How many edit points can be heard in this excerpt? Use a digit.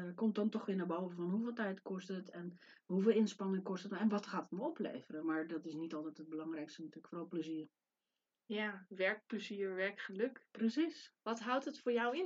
1